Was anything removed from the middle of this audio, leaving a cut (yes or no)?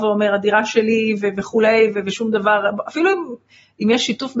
no